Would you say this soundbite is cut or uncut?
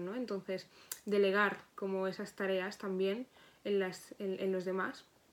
uncut